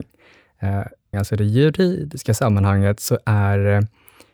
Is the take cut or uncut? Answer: cut